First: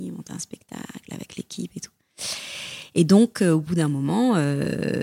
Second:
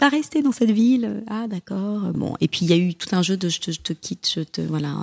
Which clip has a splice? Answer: second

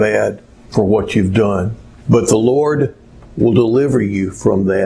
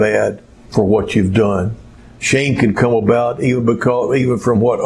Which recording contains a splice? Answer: first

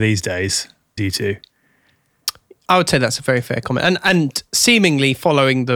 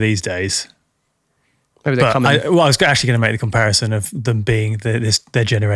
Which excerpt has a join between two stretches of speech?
first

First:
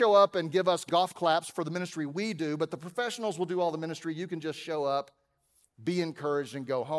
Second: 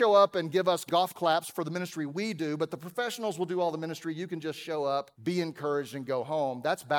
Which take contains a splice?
second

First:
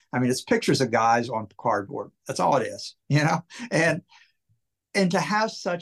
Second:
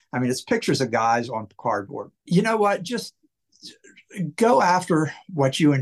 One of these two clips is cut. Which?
second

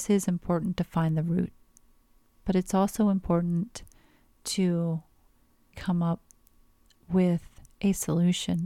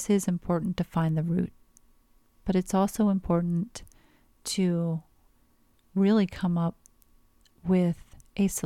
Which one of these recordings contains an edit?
first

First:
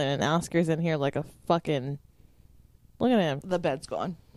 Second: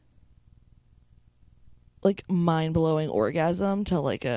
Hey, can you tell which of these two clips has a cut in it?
first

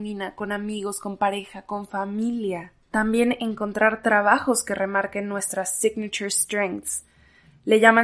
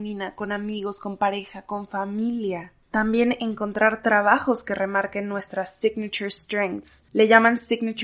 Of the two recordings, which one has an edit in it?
second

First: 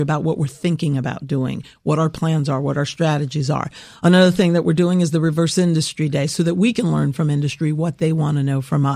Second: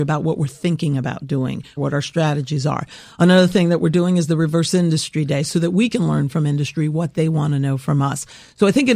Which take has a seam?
second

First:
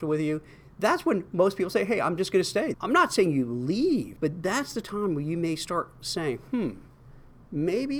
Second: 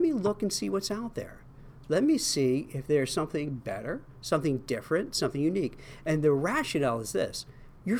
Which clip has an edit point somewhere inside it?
first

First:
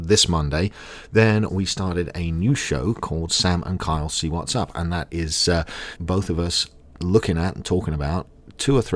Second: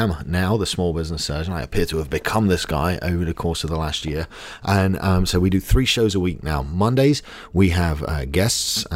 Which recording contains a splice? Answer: first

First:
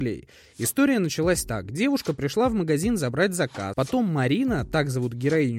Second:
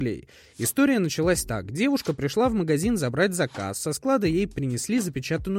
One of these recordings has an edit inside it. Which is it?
first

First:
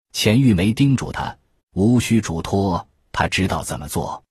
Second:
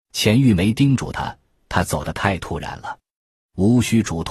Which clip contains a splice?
first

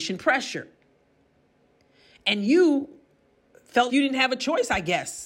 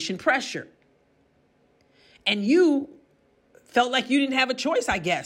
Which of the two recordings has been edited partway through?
first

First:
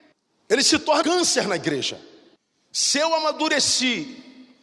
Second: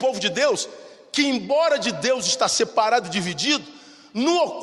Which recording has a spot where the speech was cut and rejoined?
first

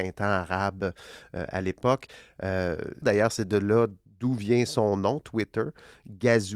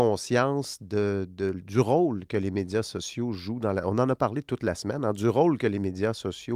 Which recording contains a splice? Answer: first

